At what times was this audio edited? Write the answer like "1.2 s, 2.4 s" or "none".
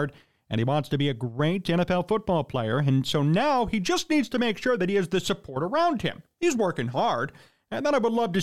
none